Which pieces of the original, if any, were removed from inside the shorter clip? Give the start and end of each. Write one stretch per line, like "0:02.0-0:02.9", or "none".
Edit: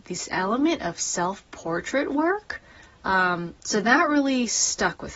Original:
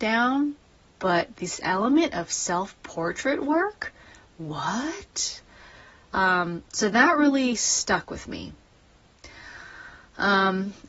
0:04.2-0:05.9